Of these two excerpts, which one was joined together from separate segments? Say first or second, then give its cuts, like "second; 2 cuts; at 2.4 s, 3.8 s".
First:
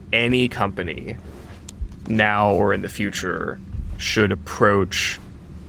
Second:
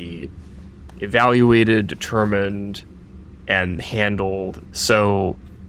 second; 1 cut; at 4.6 s